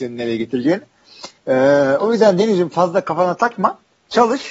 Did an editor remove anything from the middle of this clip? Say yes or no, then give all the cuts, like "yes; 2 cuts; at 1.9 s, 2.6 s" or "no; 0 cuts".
yes; 1 cut; at 1.4 s